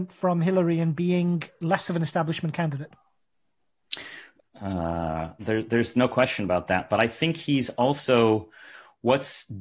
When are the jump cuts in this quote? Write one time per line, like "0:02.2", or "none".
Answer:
0:04.4